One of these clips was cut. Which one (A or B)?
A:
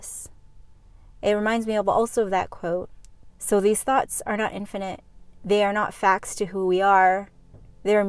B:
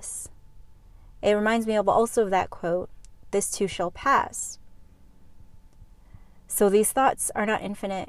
A